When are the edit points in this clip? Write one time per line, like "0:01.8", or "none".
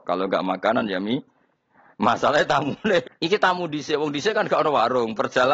0:03.0